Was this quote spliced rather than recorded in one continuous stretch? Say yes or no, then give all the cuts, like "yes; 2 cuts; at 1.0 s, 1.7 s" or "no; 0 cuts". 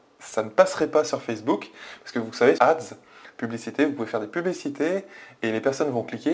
yes; 1 cut; at 2.6 s